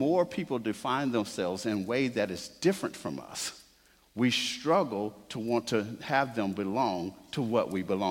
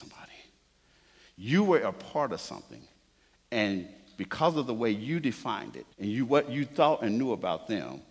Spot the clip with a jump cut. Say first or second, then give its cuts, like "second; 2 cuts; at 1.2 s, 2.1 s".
second; 1 cut; at 5.9 s